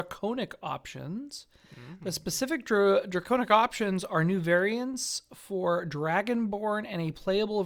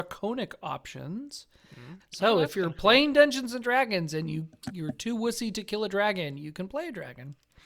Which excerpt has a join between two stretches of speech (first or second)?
second